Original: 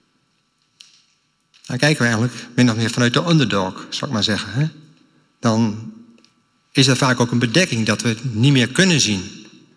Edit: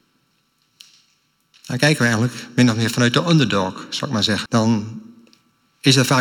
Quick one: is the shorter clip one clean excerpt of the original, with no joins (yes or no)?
no